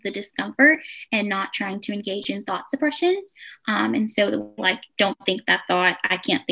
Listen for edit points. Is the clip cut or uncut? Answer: cut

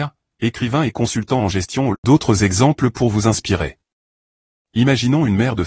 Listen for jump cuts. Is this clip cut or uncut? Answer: cut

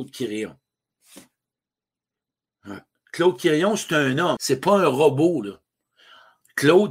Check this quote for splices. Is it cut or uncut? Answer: cut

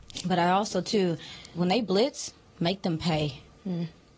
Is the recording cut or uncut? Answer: cut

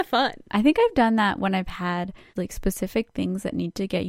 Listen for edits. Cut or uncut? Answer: cut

